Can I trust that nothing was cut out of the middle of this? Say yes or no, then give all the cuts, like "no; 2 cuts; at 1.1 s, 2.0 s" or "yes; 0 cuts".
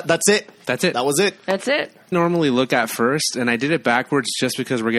no; 1 cut; at 2.1 s